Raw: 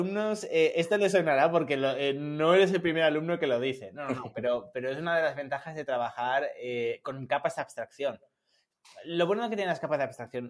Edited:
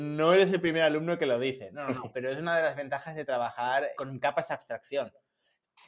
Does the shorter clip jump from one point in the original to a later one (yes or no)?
yes